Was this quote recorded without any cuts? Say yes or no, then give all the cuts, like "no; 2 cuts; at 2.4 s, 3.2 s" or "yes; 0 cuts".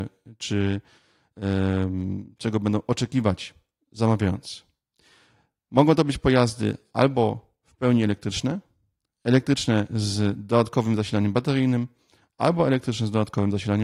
yes; 0 cuts